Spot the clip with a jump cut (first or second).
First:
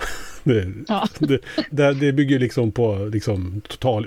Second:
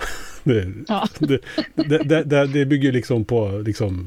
first